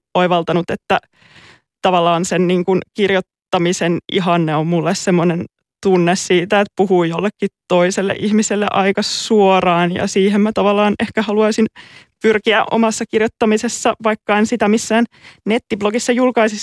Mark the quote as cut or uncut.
uncut